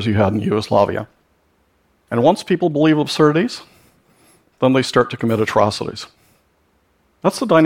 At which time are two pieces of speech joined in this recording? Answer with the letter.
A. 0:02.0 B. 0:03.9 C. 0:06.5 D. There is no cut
A